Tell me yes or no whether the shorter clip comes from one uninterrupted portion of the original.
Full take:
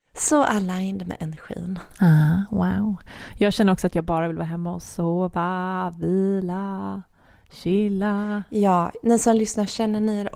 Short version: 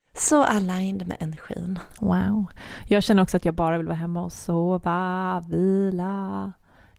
no